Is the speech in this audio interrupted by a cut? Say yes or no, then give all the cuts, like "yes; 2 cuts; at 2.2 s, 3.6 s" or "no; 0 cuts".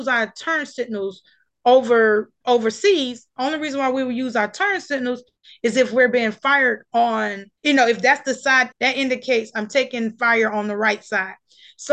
yes; 2 cuts; at 7.6 s, 8.7 s